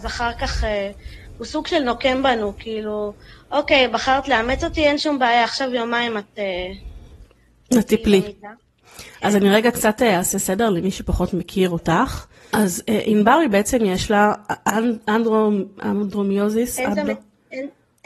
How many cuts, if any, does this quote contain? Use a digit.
0